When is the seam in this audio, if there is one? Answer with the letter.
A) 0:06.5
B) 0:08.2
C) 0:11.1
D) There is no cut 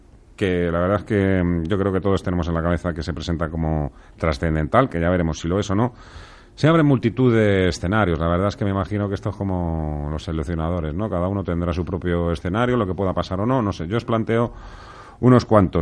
D